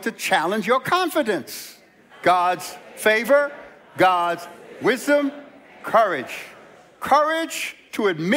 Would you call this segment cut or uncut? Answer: cut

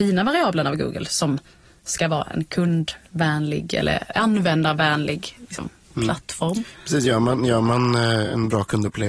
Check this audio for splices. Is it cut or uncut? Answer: uncut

